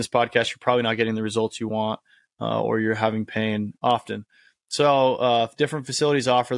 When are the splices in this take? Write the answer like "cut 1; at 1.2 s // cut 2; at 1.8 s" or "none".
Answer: cut 1; at 3.8 s